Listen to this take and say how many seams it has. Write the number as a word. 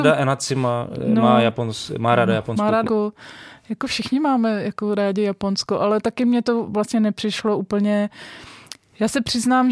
one